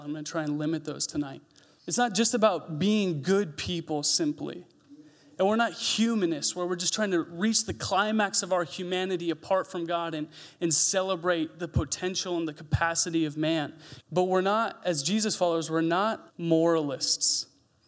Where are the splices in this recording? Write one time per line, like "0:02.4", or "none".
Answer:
0:01.8
0:14.0
0:16.3